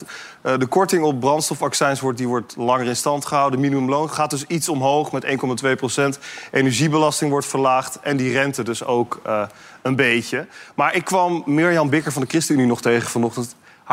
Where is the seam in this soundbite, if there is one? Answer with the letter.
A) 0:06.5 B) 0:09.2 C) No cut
C